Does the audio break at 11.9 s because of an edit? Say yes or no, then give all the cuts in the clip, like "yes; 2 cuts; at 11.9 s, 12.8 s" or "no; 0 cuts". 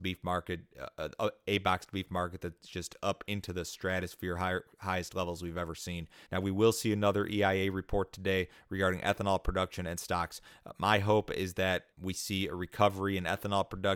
yes; 2 cuts; at 6.3 s, 11.9 s